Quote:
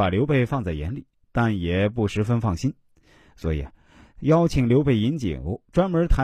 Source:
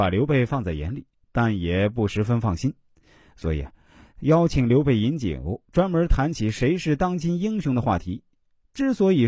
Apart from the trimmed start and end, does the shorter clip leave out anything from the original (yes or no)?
no